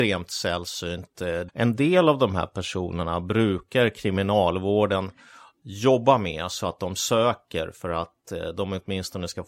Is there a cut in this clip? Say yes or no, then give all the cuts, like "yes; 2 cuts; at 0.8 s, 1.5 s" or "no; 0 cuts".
yes; 1 cut; at 1.5 s